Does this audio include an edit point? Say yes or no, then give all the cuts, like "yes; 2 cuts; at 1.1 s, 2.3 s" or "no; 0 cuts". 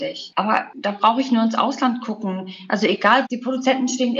yes; 1 cut; at 3.2 s